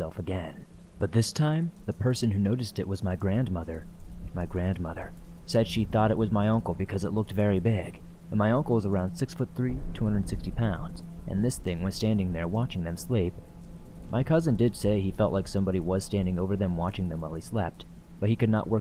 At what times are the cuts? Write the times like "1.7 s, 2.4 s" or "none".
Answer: 4.3 s